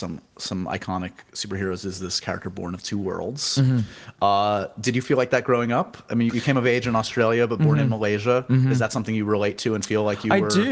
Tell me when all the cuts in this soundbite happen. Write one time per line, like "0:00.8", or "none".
0:06.3